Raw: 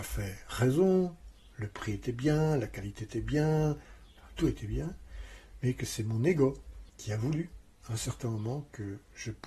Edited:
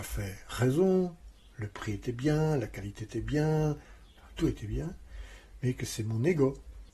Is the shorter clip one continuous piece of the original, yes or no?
yes